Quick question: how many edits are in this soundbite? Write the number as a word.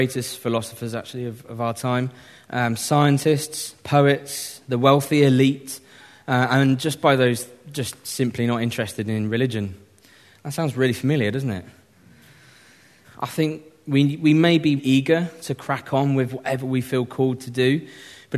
two